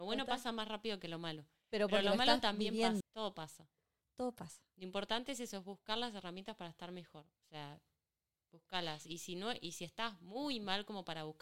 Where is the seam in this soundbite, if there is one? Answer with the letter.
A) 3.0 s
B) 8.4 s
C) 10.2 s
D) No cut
A